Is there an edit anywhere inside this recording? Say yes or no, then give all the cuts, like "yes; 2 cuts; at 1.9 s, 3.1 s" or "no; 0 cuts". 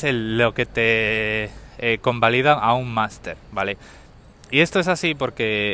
no; 0 cuts